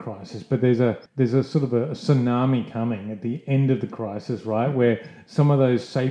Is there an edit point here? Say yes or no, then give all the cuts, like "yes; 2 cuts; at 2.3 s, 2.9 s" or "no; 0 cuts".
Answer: yes; 1 cut; at 1.1 s